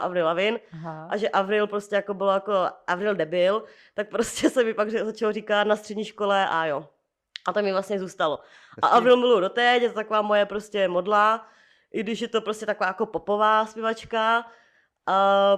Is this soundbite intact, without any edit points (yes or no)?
yes